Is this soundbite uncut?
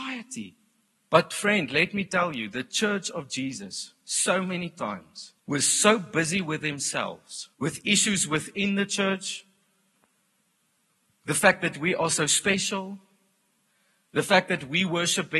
no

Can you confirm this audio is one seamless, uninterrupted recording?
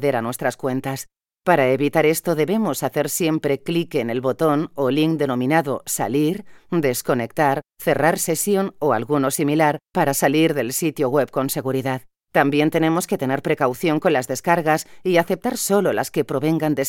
yes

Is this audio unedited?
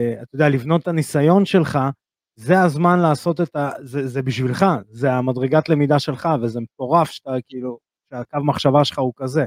yes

